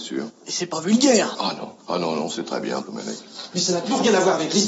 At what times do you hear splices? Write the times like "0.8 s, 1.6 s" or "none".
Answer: 1.8 s, 2.8 s